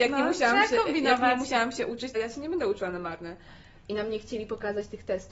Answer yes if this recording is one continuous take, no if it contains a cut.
no